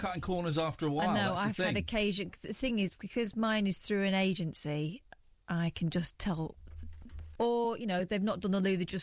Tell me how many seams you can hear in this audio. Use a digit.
1